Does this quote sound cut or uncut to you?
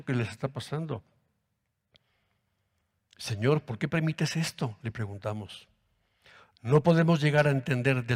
uncut